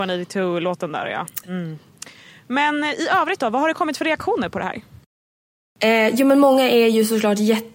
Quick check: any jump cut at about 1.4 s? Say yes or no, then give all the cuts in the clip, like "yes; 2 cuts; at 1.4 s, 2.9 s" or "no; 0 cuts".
yes; 1 cut; at 1.4 s